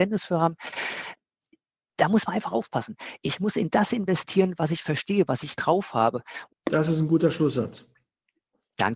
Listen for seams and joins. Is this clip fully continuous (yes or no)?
no